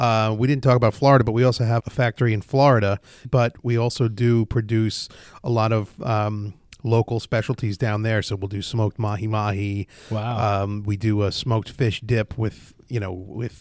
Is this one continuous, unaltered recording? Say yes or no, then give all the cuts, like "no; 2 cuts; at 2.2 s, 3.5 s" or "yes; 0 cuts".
no; 2 cuts; at 1.8 s, 3.2 s